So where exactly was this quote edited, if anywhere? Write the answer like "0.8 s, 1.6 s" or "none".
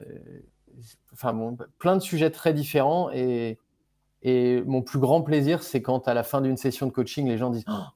none